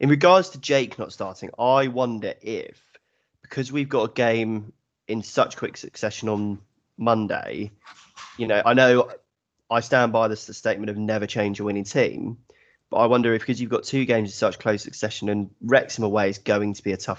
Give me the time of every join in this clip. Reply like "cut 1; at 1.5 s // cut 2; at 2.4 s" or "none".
cut 1; at 8.6 s